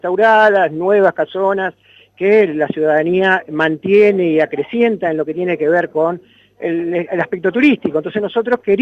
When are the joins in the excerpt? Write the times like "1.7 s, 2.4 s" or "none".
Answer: none

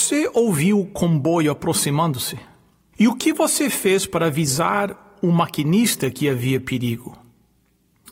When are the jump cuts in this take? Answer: 2.9 s

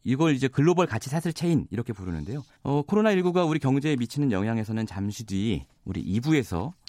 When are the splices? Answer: 2.6 s

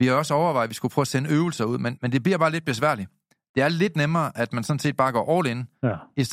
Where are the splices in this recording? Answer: 2.0 s

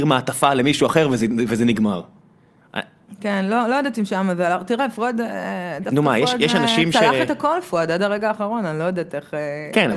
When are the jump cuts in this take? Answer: none

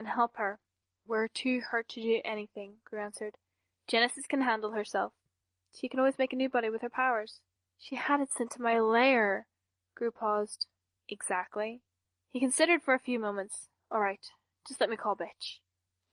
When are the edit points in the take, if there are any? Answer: 7.6 s, 11.0 s

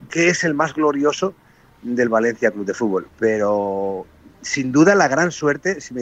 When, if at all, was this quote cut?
3.1 s

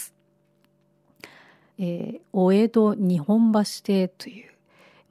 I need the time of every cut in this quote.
1.7 s

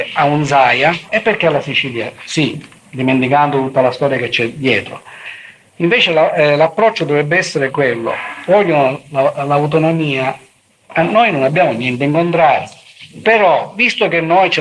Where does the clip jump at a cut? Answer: 1.1 s

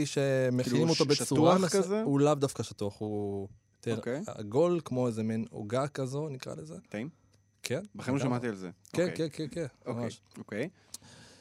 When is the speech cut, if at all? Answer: none

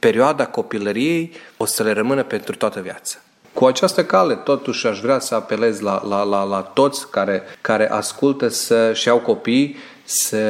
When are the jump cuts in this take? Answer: 3.4 s

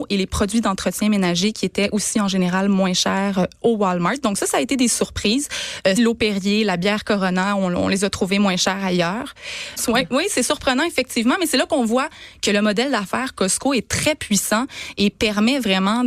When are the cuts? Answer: 6.0 s, 9.8 s

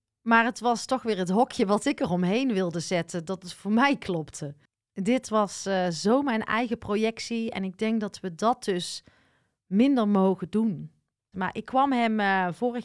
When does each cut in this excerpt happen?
11.3 s

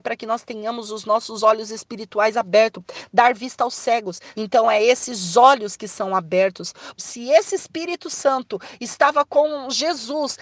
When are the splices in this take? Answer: 4.3 s, 7.0 s

